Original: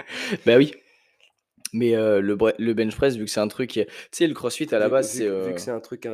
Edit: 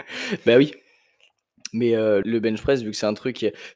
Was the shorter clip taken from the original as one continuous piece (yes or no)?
no